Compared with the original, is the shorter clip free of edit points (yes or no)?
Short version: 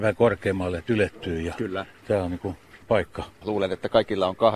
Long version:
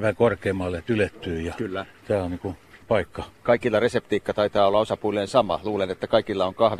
no